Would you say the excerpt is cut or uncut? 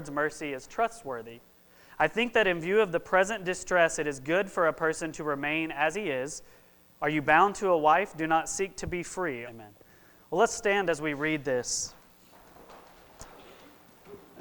cut